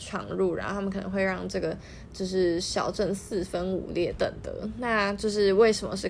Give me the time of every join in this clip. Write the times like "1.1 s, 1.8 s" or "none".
4.2 s